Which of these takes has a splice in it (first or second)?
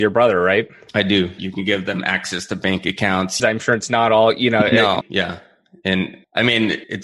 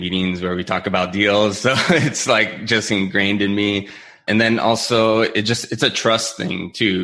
first